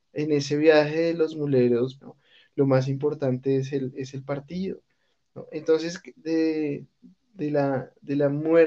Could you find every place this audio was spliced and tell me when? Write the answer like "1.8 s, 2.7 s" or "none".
2.0 s, 6.2 s